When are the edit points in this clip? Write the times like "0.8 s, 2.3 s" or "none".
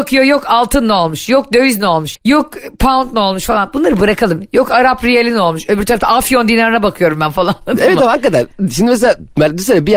2.1 s